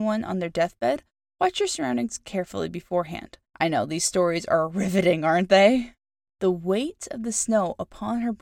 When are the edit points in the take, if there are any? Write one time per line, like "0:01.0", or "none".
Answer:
0:03.5
0:06.3